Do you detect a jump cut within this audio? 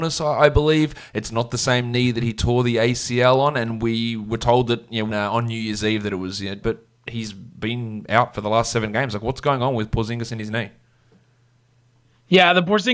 yes; 2 cuts; at 5.1 s, 6.6 s

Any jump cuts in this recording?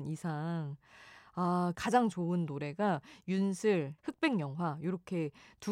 yes; 2 cuts; at 1.7 s, 4.0 s

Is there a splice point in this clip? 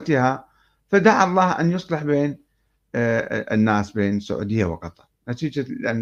no; 0 cuts

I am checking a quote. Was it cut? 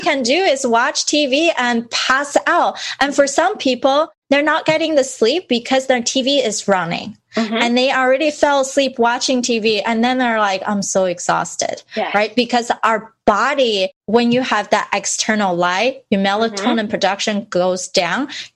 no; 0 cuts

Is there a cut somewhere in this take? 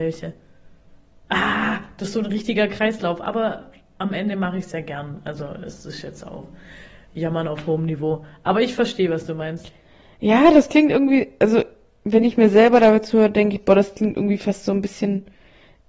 no; 0 cuts

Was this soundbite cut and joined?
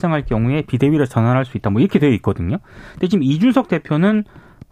no; 0 cuts

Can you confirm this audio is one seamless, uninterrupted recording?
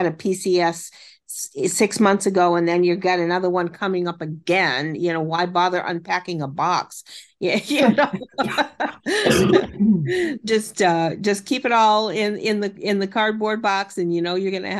yes; 0 cuts

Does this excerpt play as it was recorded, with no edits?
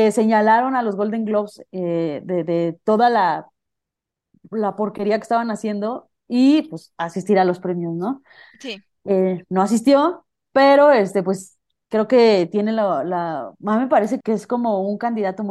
no; 1 cut; at 14.2 s

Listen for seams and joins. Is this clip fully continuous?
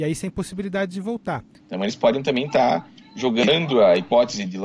no; 1 cut; at 1.5 s

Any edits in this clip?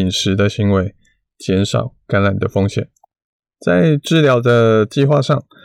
no; 0 cuts

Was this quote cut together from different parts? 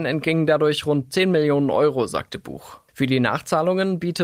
yes; 1 cut; at 2.9 s

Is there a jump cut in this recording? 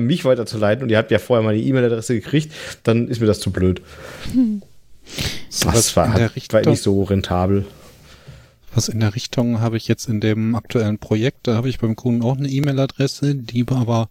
no; 0 cuts

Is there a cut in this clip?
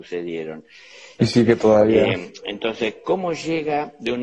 yes; 1 cut; at 1.2 s

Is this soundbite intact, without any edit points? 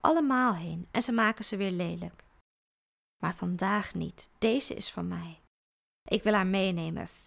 no; 1 cut; at 0.9 s

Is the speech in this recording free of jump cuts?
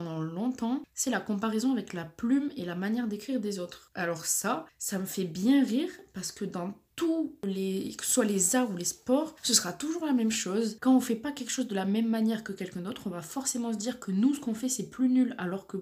yes; 0 cuts

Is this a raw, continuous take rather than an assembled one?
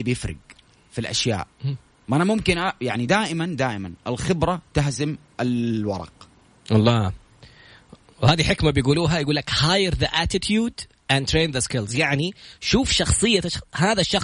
yes; 0 cuts

